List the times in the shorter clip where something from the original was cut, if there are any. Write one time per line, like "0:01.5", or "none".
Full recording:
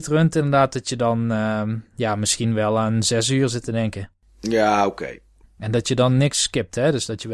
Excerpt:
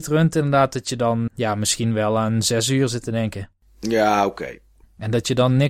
0:01.3